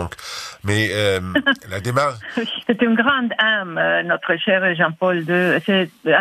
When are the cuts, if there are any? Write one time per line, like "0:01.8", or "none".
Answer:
0:02.6